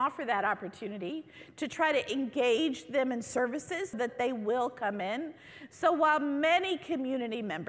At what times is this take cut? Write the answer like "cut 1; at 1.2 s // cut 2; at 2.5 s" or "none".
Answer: cut 1; at 3.9 s